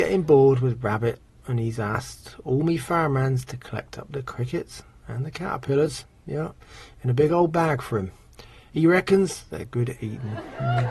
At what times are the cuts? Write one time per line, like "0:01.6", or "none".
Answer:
none